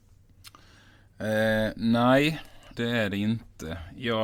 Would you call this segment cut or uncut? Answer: cut